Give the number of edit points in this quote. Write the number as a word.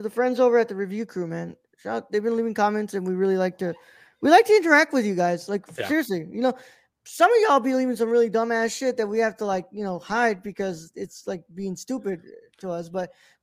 zero